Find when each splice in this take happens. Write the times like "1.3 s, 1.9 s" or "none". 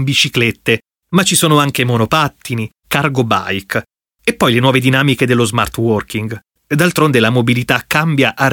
2.8 s, 6.5 s